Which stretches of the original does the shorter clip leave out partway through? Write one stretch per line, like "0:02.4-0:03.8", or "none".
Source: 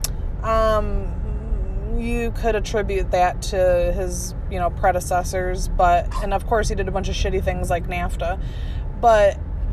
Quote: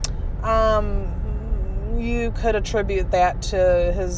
none